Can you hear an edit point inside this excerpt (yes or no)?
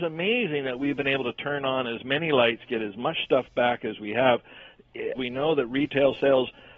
yes